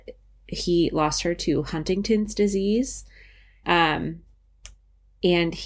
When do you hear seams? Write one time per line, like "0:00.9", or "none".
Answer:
0:03.6